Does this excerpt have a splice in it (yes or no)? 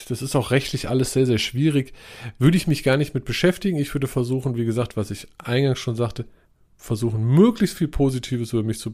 no